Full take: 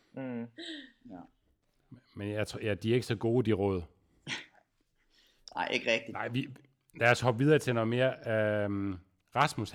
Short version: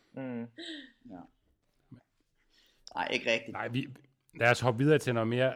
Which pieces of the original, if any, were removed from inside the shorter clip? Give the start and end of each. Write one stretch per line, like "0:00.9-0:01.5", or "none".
0:02.0-0:04.6